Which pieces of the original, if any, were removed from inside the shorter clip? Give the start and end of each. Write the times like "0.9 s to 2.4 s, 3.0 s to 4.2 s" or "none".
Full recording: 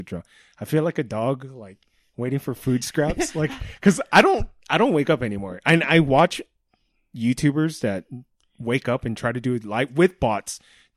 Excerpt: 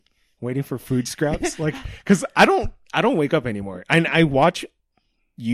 none